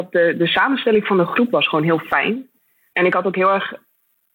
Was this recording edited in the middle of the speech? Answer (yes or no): yes